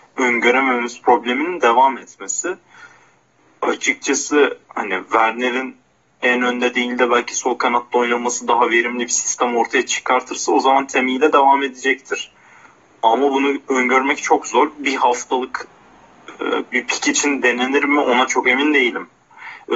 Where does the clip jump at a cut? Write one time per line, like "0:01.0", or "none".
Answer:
none